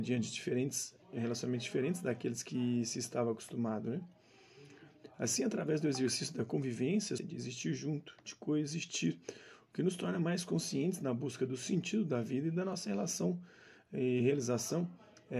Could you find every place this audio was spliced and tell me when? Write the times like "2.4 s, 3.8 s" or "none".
1.0 s, 7.2 s